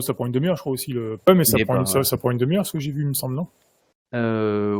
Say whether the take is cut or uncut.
cut